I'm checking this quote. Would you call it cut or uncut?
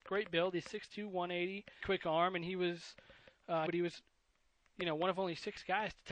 cut